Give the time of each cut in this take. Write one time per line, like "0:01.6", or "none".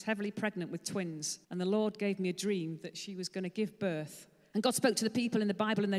0:01.4
0:04.5